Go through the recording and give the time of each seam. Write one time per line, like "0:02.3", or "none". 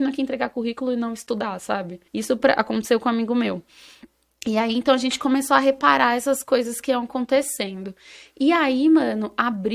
0:02.1